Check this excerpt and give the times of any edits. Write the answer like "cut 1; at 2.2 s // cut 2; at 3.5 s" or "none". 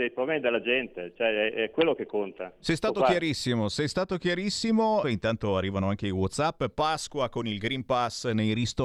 cut 1; at 5.0 s